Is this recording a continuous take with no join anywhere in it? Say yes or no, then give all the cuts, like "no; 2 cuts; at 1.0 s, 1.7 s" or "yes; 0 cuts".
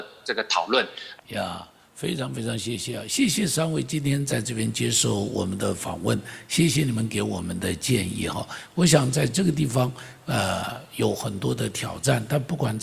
no; 1 cut; at 1.2 s